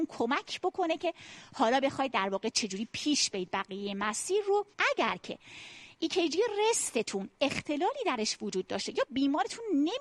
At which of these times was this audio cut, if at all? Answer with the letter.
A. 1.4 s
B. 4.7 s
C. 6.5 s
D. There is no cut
B